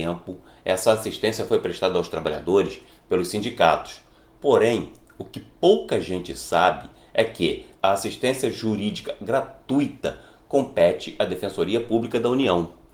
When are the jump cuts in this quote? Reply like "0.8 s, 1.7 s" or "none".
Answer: 7.7 s